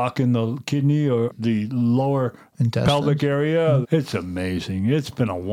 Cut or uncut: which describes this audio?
cut